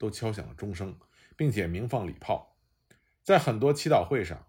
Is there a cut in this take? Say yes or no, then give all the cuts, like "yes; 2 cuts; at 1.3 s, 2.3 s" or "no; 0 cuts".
no; 0 cuts